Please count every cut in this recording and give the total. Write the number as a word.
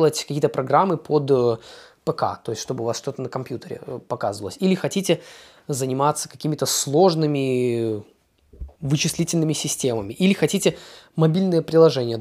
one